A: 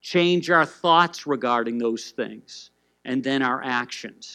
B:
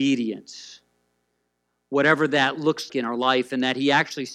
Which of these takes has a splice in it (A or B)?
B